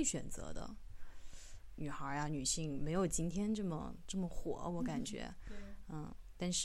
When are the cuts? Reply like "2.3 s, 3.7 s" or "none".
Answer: 1.7 s